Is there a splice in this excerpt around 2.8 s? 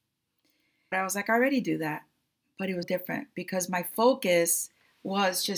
yes; 2 cuts; at 0.9 s, 2.8 s

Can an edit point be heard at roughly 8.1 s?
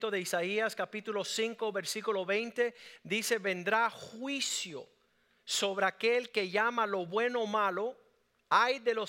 no; 0 cuts

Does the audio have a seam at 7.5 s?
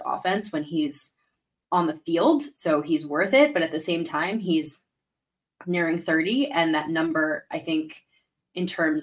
no; 0 cuts

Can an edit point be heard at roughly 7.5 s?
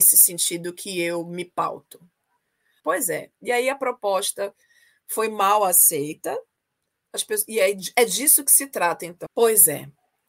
no; 2 cuts; at 2.8 s, 9.3 s

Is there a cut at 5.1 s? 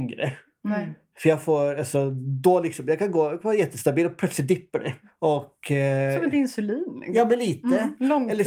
no; 0 cuts

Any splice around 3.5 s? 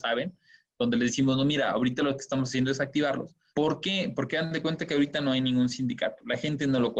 yes; 1 cut; at 3.5 s

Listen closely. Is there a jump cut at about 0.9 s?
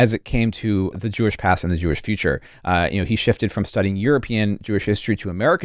yes; 1 cut; at 0.9 s

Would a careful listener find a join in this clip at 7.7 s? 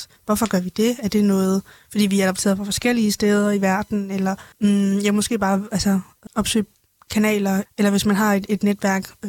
yes; 3 cuts; at 4.5 s, 6.3 s, 7.7 s

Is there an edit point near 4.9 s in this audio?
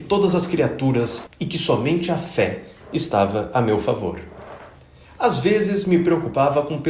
no; 1 cut; at 1.3 s

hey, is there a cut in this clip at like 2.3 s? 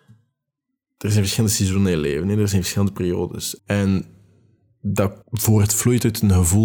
no; 2 cuts; at 3.6 s, 5.2 s

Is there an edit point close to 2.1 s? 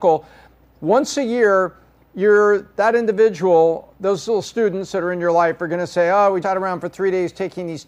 no; 1 cut; at 6.4 s

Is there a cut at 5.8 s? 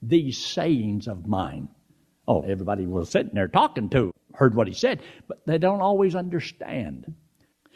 no; 1 cut; at 2.4 s

